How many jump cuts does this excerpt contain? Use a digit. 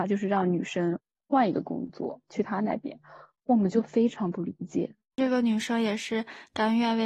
0